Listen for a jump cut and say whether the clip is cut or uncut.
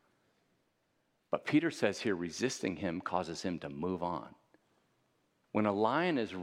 cut